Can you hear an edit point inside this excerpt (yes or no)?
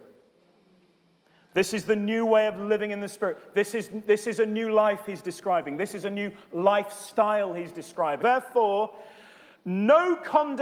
yes